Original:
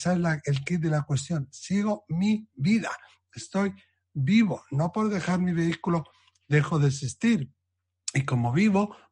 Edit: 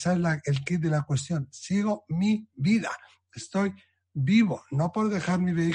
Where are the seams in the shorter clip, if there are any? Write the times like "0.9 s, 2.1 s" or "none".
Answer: none